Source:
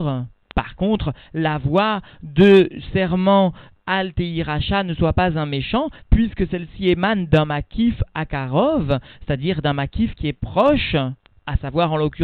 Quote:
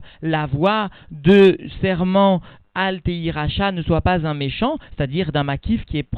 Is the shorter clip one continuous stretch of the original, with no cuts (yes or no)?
no